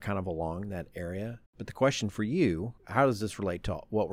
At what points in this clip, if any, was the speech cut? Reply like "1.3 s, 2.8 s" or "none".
1.5 s, 2.8 s